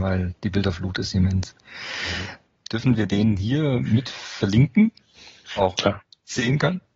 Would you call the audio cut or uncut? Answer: cut